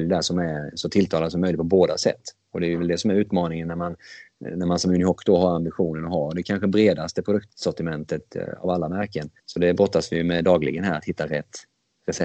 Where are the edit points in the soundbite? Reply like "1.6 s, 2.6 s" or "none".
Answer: 9.4 s

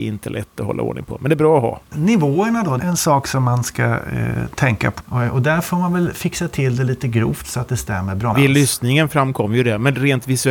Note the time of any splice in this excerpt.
2.8 s, 5.0 s, 8.3 s

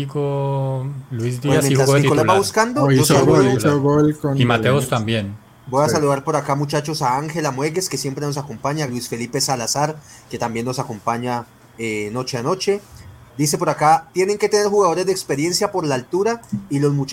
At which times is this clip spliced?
8.9 s, 13.3 s

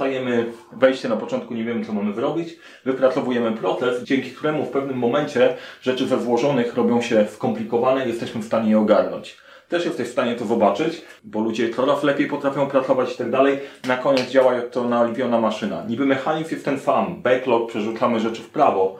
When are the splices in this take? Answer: 4.0 s, 11.2 s

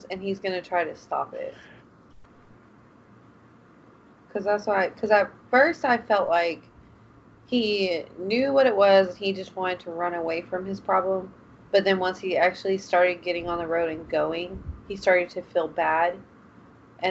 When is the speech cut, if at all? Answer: none

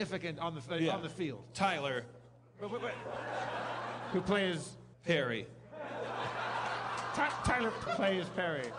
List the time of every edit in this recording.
4.9 s, 7.9 s

